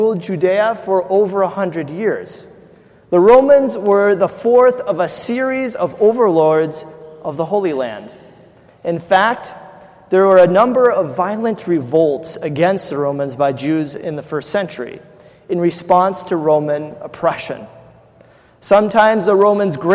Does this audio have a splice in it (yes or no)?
yes